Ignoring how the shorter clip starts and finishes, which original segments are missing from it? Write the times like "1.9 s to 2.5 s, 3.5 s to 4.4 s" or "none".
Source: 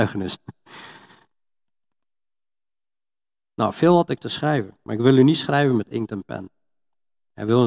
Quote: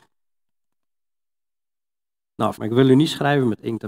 3.7 s to 4.8 s